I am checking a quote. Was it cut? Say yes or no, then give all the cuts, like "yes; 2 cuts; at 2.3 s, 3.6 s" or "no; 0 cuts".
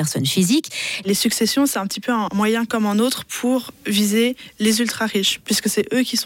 yes; 1 cut; at 1.0 s